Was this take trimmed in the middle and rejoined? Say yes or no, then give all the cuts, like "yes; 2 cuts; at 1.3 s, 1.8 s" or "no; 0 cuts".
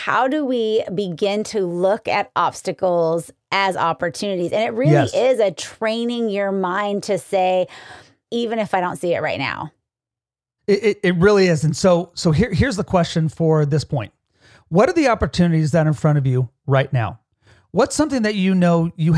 yes; 1 cut; at 8.3 s